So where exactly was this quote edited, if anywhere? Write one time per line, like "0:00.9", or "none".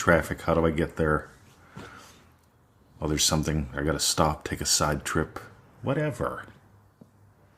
none